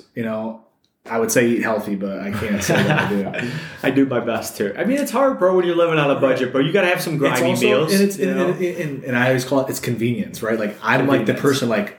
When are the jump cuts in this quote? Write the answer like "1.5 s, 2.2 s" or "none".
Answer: none

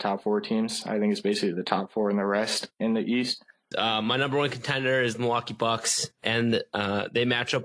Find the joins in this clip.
3.7 s, 6.2 s

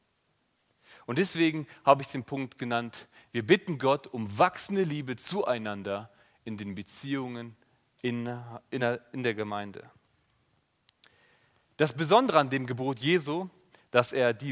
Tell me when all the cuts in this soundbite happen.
none

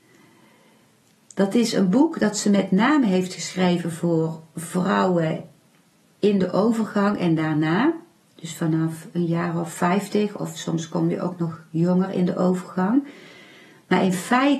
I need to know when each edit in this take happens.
none

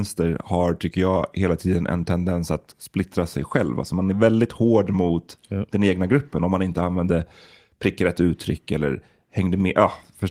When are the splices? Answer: none

